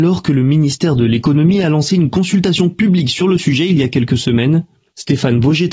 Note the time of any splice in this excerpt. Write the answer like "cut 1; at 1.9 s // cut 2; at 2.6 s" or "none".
none